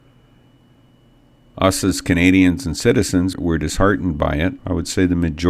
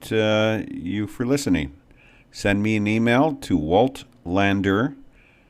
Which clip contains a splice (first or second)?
first